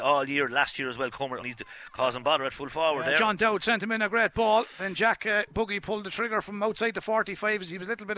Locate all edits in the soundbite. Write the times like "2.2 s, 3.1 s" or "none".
1.4 s